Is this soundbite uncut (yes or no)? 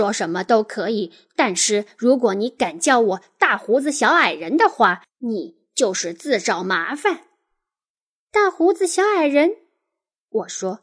yes